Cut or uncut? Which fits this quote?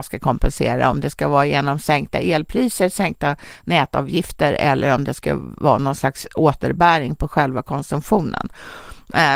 uncut